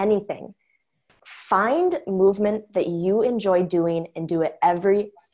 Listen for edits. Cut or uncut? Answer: uncut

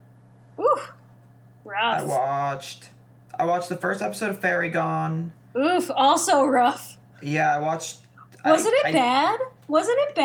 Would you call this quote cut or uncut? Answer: uncut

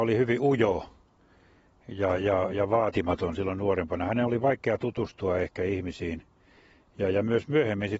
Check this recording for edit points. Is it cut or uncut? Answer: uncut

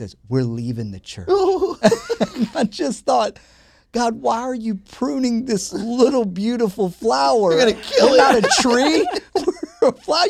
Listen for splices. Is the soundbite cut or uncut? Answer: uncut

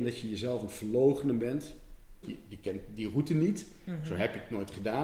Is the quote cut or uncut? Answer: cut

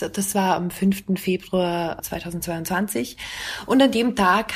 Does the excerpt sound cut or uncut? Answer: uncut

